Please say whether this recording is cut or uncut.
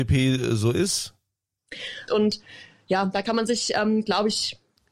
cut